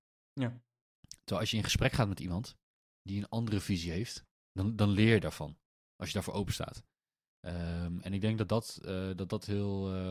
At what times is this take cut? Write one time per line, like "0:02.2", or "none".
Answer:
none